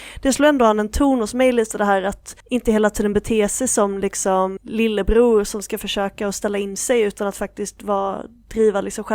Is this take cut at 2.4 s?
yes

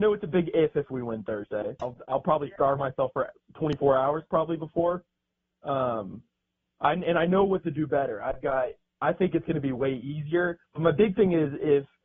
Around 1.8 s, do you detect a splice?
yes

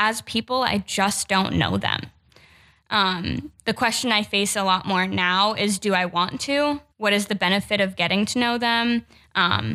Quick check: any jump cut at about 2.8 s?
no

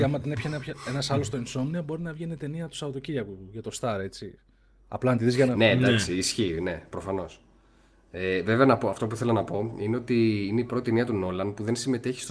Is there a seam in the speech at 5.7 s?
no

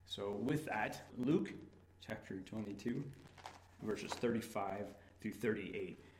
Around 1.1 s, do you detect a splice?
yes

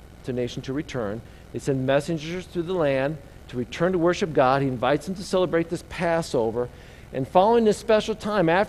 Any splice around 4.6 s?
no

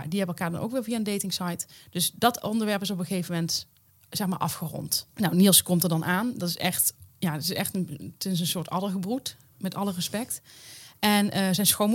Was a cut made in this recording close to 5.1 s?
yes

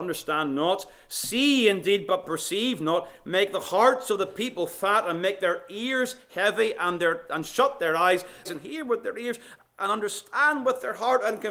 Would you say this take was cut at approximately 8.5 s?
yes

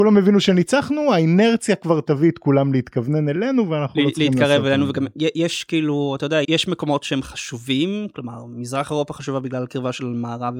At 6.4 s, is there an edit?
yes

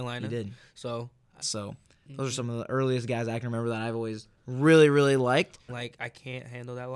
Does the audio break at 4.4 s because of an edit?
yes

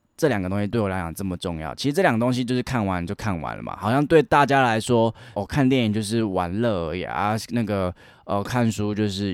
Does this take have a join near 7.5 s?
no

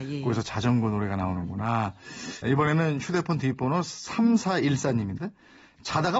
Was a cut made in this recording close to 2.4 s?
yes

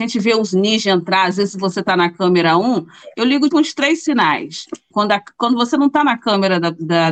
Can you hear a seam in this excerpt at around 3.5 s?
yes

